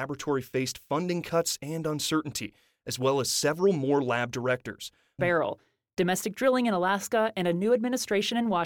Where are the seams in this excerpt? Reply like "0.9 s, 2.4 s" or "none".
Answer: 5.2 s